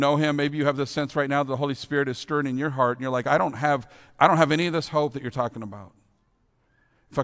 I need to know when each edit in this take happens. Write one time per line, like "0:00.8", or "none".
none